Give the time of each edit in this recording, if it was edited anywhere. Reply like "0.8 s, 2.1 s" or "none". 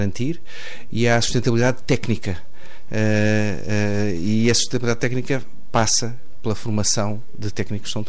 none